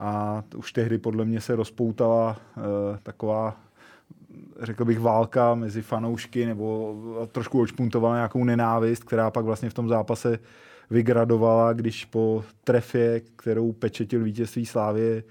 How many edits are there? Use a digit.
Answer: 1